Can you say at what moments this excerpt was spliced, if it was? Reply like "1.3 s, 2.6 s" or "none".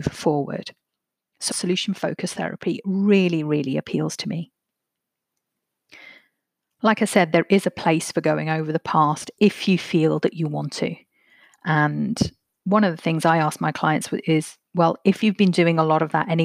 1.5 s